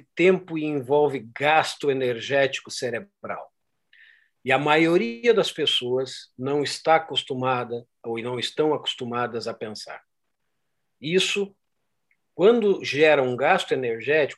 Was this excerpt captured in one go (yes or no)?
yes